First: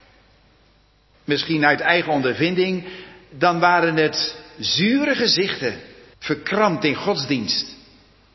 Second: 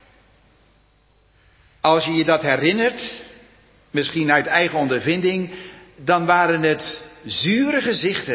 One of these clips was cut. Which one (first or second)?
first